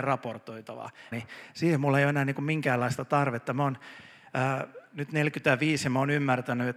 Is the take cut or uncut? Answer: cut